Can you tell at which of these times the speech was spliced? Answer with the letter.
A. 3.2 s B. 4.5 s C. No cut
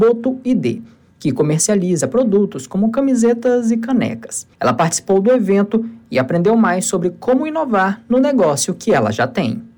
B